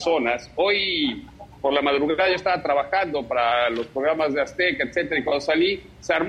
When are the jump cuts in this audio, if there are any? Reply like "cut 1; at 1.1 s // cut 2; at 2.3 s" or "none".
cut 1; at 1.5 s